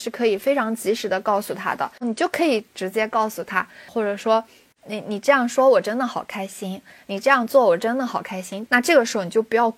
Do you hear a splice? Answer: yes; 2 cuts; at 3.9 s, 8.7 s

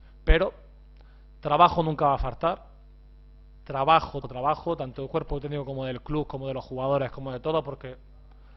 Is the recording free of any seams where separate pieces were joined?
no; 1 cut; at 4.2 s

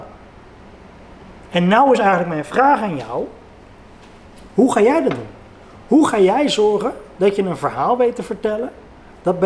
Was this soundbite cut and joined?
no; 0 cuts

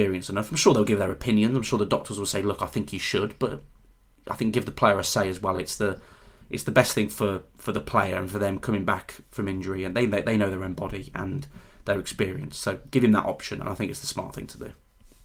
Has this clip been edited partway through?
no; 0 cuts

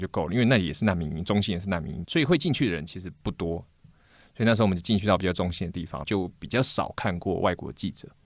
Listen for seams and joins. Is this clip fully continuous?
no; 2 cuts; at 2.0 s, 6.0 s

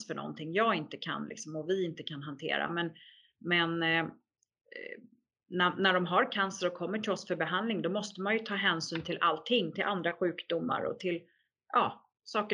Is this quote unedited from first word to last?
yes; 0 cuts

